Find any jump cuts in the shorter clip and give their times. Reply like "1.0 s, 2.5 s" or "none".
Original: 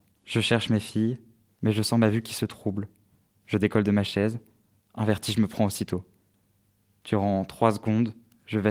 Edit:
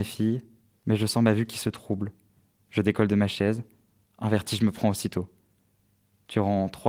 none